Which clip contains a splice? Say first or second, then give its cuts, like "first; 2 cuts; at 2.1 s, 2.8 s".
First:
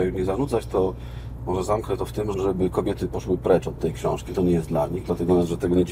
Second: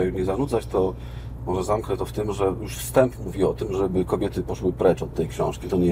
first; 1 cut; at 2.3 s